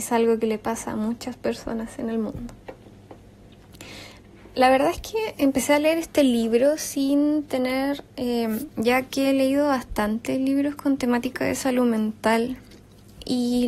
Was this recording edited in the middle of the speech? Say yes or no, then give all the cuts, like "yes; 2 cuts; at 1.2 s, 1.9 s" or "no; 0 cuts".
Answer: yes; 1 cut; at 8.7 s